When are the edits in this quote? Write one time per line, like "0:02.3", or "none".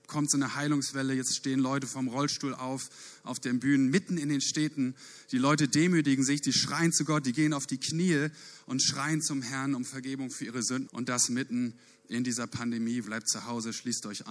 0:10.9
0:13.0

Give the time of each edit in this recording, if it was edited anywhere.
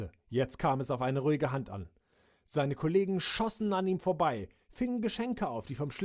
none

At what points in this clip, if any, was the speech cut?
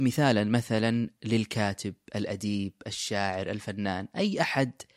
none

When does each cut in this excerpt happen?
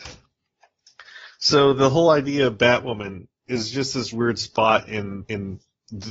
0:04.1

